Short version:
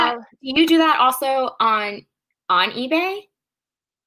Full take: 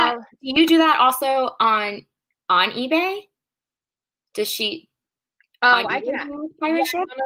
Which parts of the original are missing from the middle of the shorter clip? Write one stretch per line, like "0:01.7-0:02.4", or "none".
none

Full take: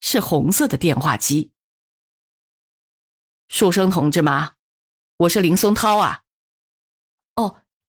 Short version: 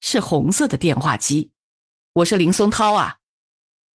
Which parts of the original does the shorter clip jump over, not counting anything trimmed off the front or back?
0:01.9-0:05.0

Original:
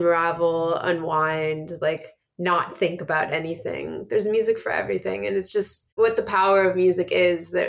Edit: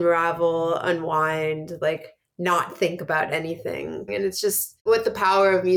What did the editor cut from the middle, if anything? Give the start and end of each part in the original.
0:04.1-0:05.2

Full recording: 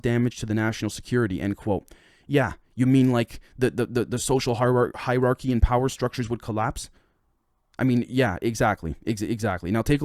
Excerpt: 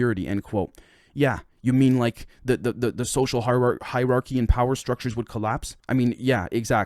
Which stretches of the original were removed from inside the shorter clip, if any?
0:06.9-0:07.7

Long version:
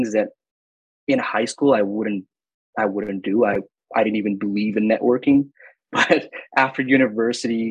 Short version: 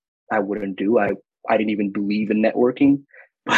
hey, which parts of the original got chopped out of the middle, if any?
none

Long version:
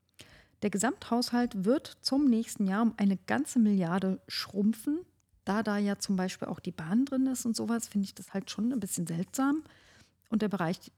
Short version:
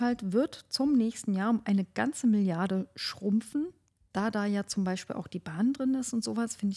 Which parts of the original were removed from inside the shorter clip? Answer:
none

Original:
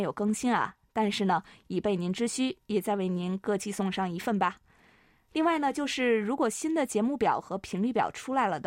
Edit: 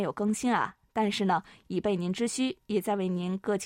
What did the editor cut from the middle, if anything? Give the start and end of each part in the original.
none

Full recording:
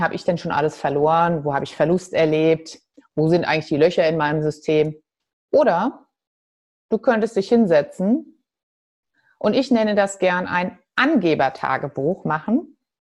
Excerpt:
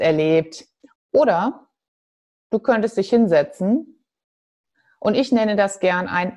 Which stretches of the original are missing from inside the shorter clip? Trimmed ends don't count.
0:03.1-0:05.3

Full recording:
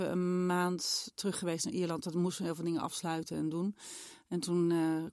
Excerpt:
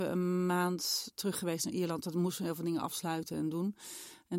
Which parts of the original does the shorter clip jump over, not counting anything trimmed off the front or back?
none

